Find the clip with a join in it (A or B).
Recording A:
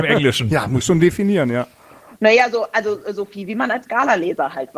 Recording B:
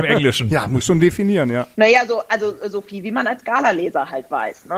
B